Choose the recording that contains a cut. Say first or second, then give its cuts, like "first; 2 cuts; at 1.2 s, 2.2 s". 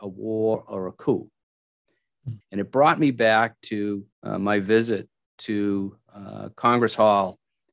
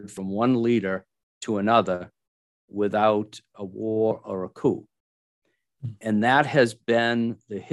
first; 2 cuts; at 2.4 s, 4.1 s